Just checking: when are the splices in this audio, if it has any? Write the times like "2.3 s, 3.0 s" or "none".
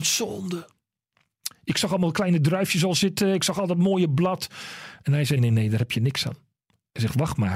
5.4 s